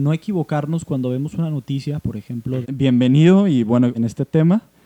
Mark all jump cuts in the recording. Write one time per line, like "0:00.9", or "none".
0:02.6
0:03.9